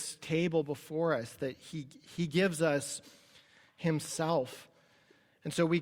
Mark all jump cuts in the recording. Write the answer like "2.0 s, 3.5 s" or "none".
none